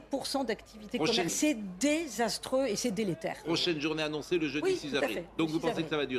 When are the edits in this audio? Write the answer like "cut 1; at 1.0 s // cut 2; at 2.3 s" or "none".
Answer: cut 1; at 1.3 s